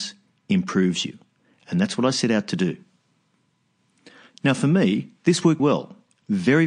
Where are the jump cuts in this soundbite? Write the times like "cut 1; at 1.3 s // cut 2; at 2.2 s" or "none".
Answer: cut 1; at 5.6 s